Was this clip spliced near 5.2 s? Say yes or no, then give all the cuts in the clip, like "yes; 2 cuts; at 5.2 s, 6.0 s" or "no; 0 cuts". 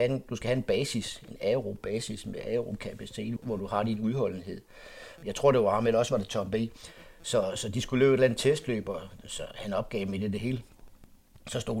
yes; 2 cuts; at 3.4 s, 5.2 s